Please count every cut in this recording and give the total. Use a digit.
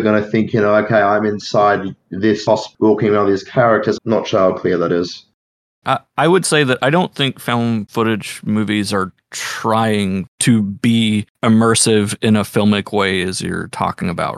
2